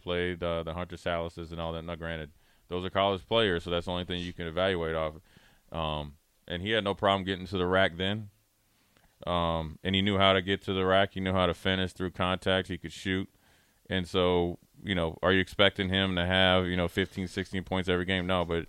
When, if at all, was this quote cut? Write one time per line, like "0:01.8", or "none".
none